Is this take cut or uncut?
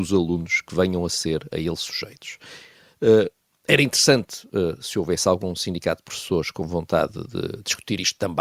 uncut